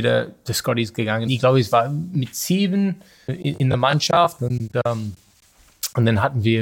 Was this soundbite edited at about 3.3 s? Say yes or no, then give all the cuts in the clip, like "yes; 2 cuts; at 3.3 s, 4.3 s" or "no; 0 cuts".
yes; 2 cuts; at 1.3 s, 3.3 s